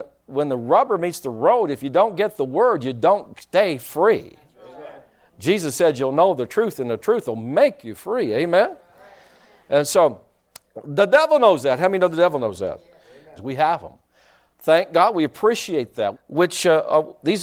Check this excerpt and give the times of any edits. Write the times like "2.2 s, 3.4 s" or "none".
13.4 s, 16.1 s